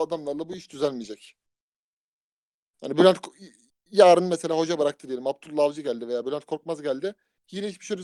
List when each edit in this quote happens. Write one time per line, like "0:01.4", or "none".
none